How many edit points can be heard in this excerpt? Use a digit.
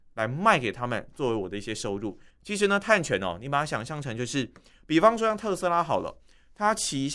1